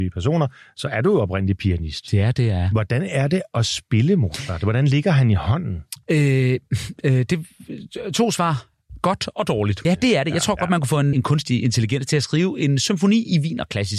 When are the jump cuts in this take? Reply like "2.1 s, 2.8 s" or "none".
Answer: 9.8 s, 11.1 s